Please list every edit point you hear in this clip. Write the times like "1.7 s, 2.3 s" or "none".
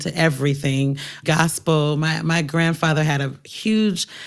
1.2 s